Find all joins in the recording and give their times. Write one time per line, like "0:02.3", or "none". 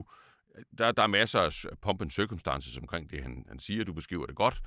none

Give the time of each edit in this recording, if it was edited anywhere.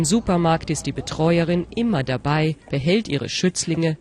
0:02.6

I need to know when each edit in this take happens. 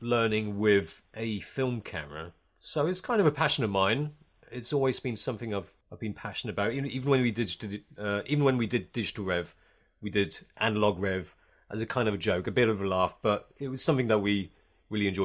0:05.8

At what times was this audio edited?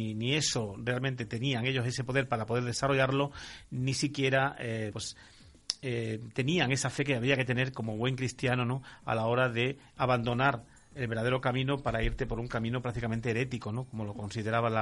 0:04.9

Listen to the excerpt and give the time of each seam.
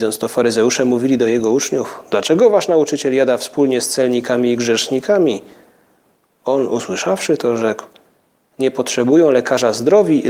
none

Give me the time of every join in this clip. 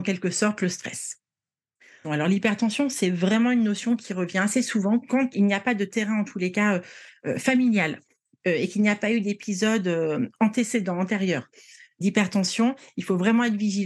0:02.0
0:05.3

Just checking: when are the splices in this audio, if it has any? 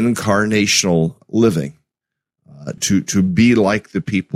0:02.8

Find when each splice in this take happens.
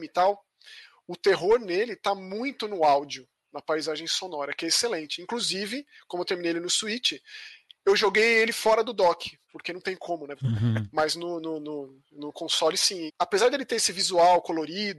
0:10.4
0:13.1

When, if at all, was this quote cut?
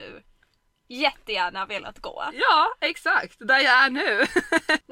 none

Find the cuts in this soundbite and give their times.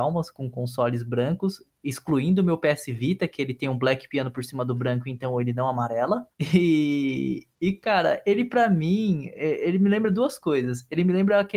0:06.3

